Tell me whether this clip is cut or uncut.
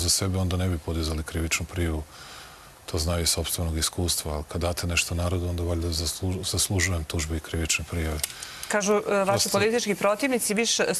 uncut